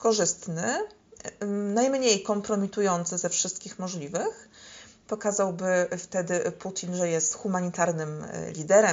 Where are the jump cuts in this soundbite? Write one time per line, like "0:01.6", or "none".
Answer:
none